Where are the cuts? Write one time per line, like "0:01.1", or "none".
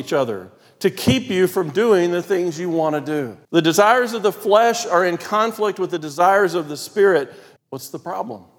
0:03.4
0:07.6